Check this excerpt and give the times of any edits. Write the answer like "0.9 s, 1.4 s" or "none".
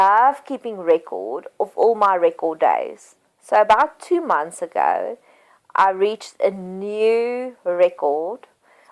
none